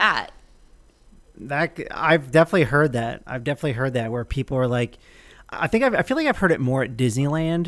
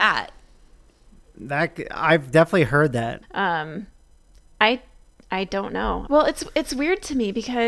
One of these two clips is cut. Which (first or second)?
second